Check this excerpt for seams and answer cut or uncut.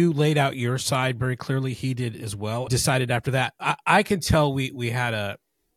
cut